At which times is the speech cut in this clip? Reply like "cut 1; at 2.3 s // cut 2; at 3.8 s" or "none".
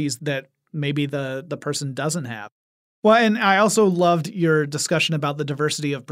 none